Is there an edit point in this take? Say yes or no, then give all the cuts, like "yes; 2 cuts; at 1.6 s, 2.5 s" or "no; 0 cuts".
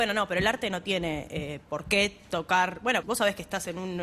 yes; 1 cut; at 3.0 s